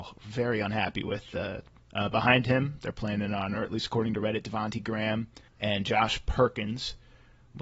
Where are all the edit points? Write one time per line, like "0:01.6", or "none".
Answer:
0:01.8
0:05.5